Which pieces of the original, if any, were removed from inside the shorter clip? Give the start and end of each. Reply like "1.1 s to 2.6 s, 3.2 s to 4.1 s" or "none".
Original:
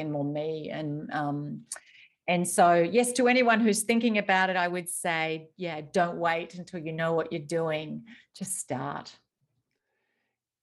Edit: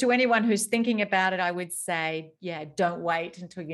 none